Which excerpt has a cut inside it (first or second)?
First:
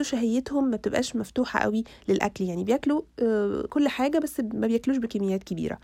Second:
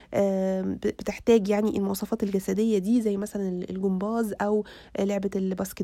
first